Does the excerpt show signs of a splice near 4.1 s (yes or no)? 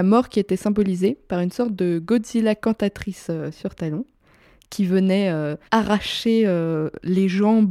no